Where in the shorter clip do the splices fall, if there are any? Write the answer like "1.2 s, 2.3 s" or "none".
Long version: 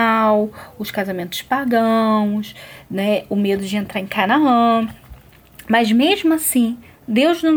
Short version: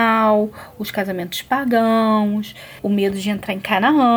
2.8 s